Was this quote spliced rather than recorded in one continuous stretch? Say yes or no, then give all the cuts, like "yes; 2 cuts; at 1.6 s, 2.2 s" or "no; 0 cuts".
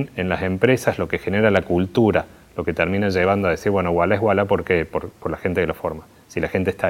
no; 0 cuts